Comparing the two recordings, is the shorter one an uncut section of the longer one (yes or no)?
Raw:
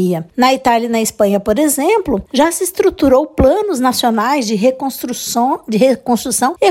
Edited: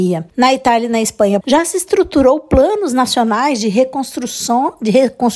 no